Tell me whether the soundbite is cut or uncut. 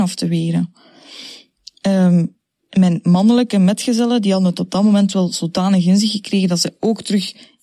uncut